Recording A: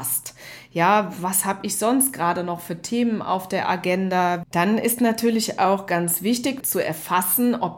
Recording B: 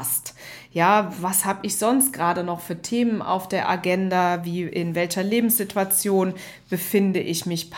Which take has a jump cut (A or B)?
A